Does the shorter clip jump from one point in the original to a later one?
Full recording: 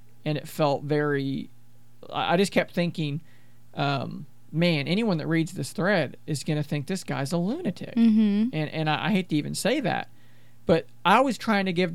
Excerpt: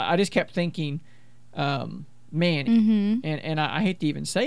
yes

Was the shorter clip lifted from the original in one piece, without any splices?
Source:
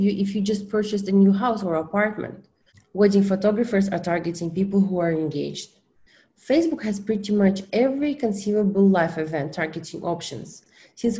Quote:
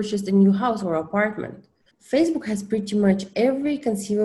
no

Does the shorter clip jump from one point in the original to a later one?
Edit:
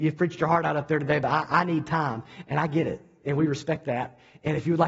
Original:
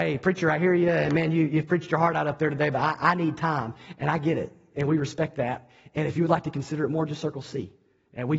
no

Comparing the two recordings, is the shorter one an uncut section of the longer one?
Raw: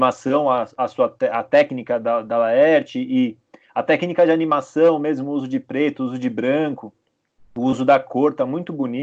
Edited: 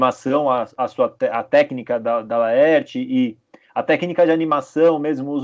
yes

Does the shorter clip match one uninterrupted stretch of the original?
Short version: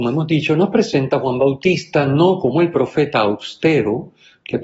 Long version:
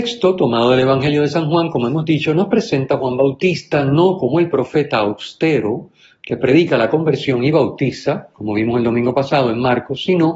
yes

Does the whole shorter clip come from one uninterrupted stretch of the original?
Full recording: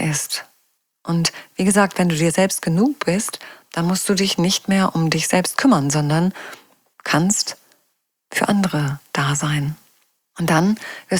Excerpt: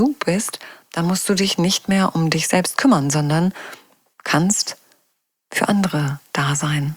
yes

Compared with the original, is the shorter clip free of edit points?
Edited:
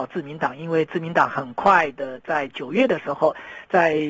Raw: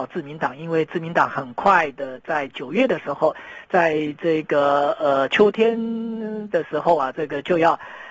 yes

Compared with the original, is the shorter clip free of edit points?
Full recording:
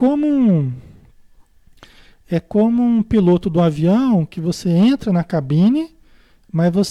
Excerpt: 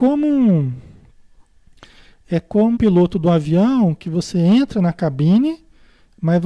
no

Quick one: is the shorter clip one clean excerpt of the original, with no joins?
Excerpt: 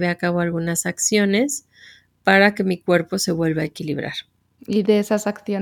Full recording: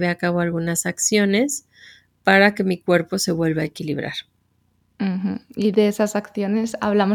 no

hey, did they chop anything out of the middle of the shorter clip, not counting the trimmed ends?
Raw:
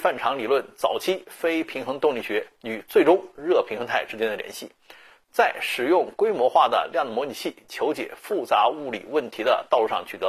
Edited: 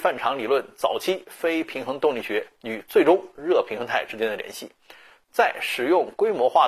no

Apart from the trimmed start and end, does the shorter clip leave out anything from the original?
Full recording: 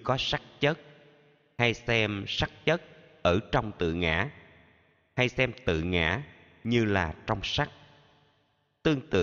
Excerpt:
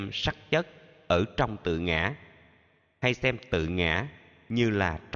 no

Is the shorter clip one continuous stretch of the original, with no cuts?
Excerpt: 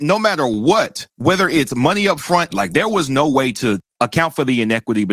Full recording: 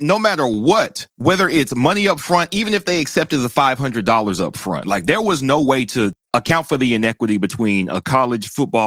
no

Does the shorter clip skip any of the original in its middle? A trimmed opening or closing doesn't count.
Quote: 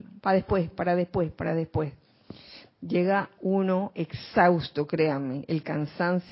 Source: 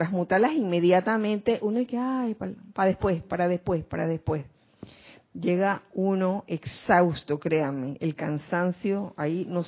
no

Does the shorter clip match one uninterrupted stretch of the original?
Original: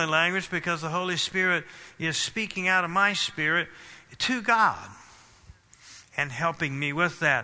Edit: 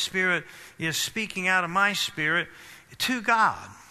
yes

